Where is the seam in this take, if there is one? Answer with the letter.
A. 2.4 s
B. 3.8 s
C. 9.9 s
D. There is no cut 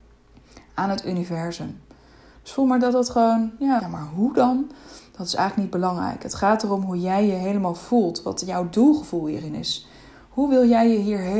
B